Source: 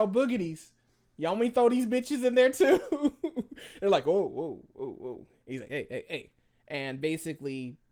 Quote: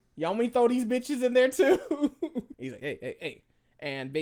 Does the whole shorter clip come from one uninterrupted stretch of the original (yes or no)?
no